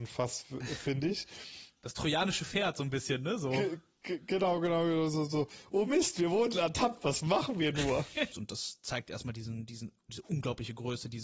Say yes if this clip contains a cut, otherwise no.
yes